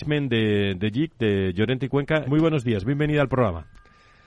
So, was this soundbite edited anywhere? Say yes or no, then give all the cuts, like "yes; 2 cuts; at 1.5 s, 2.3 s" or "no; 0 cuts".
yes; 1 cut; at 2.2 s